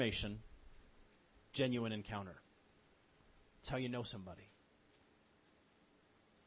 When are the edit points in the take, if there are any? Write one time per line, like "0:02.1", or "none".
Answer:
none